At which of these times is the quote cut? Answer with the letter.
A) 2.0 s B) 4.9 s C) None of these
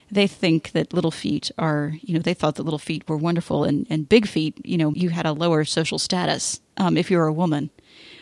B